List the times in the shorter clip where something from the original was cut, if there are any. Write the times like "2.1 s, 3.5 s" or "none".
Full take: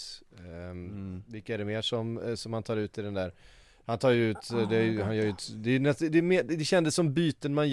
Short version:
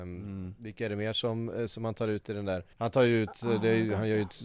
2.7 s